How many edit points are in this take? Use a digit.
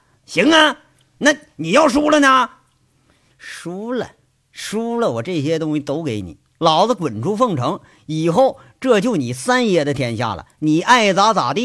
1